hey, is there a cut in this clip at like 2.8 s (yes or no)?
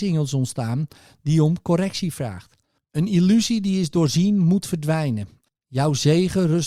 yes